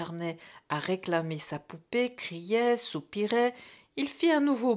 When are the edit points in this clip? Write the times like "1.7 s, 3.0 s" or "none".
none

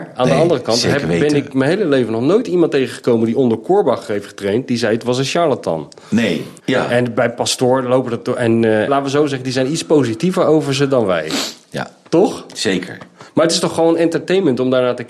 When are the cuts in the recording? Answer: 6.6 s, 8.9 s

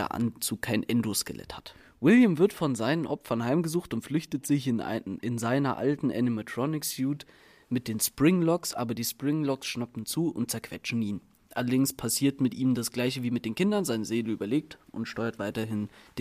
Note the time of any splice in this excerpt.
none

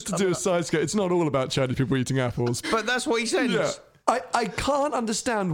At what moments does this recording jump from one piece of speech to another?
2.6 s

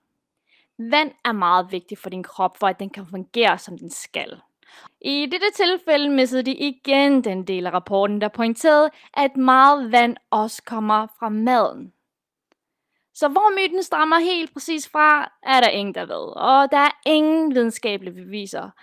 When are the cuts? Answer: 4.9 s

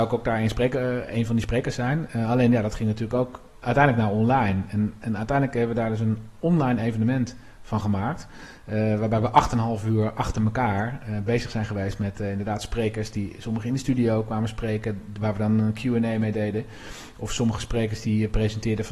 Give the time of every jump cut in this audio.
none

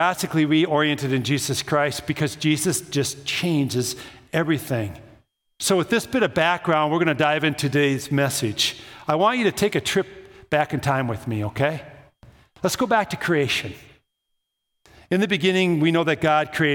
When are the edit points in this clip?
none

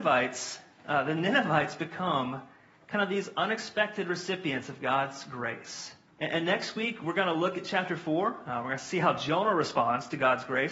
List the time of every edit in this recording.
6.1 s

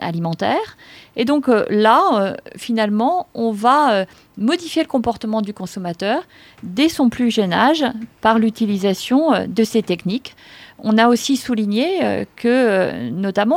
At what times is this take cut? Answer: none

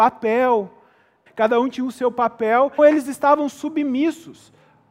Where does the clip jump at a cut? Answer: 1.3 s, 2.8 s

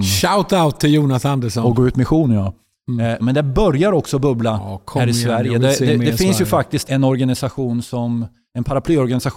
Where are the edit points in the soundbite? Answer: 3.2 s, 6.8 s

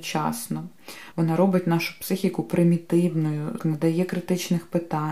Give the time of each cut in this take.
1.1 s, 3.6 s

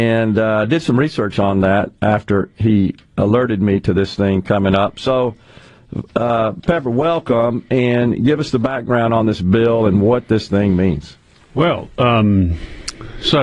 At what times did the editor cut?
none

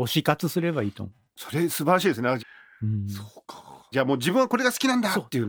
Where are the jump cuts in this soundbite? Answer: 2.4 s, 3.9 s

